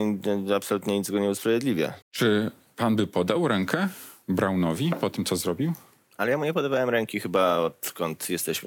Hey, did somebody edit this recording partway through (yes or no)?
yes